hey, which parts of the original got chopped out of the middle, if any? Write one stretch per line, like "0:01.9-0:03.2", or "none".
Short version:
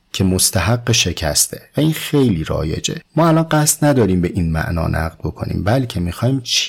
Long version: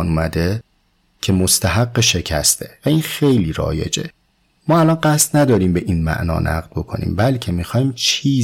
0:04.1-0:04.6